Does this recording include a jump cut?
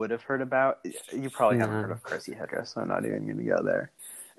no; 0 cuts

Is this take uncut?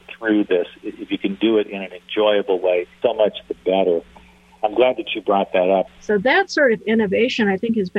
no; 2 cuts; at 3.0 s, 5.9 s

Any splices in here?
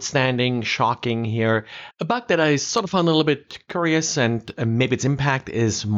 yes; 1 cut; at 1.9 s

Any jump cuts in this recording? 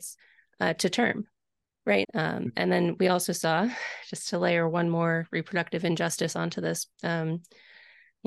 yes; 2 cuts; at 2.0 s, 6.9 s

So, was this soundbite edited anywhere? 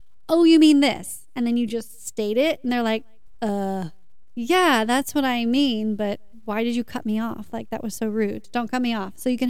no; 0 cuts

